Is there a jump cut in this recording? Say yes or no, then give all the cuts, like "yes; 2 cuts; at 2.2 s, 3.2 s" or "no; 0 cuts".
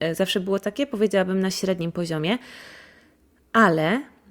no; 0 cuts